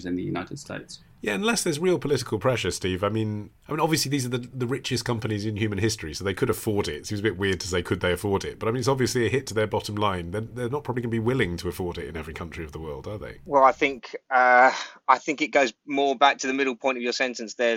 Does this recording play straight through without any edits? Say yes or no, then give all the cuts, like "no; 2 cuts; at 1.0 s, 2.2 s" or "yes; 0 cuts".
yes; 0 cuts